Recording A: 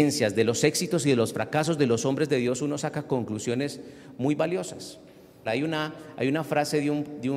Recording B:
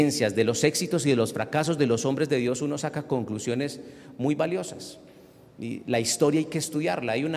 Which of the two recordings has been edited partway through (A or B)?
A